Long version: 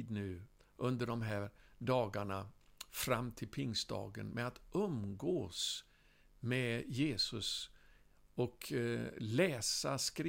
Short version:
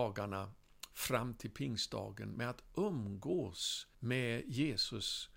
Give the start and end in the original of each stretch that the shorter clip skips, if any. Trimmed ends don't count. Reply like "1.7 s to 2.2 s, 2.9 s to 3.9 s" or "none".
5.9 s to 6.4 s